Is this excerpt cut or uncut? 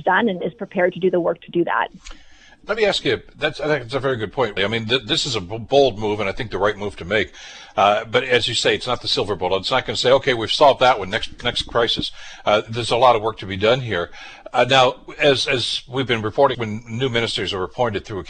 cut